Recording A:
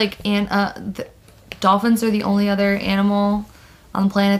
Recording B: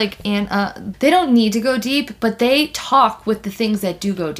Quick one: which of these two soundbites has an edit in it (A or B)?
B